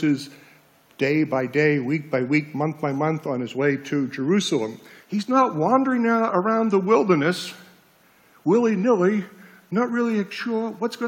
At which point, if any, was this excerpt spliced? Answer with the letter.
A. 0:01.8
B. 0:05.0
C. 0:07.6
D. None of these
B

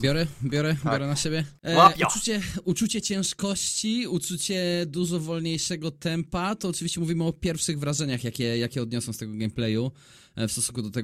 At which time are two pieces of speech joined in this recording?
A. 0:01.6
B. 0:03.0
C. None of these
A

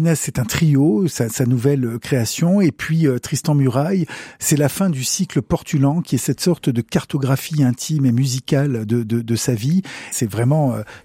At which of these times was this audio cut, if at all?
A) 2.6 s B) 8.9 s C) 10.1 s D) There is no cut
C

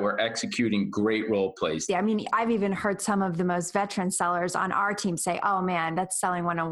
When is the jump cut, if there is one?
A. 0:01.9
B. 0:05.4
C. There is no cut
A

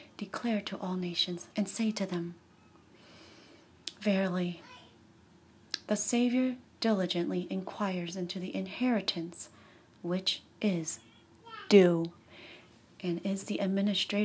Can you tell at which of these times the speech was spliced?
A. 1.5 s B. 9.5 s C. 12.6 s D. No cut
A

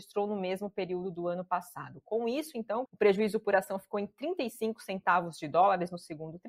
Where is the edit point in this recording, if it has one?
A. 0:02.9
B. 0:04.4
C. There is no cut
A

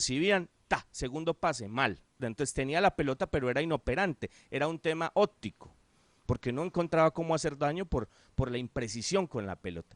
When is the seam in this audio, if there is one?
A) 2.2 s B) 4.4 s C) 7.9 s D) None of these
A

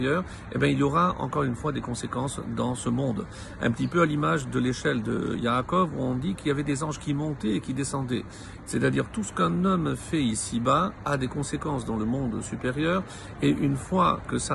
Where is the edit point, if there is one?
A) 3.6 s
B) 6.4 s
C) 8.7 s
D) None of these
C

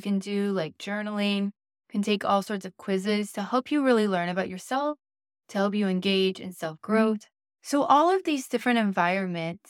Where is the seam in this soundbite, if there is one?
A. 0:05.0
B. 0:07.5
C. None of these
C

